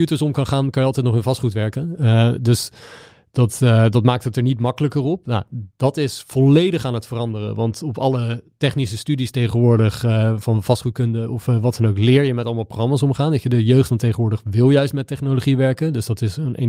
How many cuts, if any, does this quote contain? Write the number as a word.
zero